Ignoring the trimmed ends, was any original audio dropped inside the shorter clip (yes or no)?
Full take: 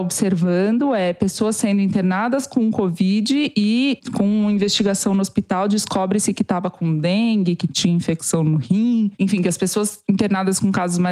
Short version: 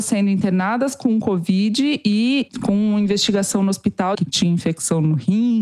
yes